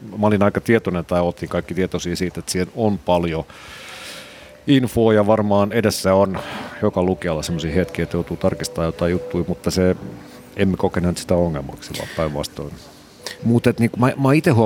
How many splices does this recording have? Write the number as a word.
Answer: one